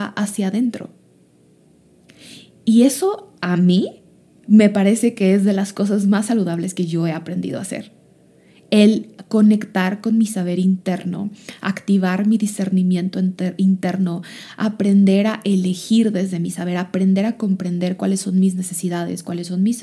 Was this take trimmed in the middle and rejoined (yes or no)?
no